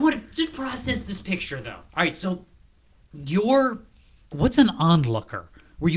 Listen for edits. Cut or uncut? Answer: cut